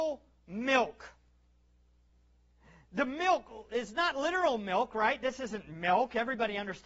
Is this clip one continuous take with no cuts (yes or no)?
yes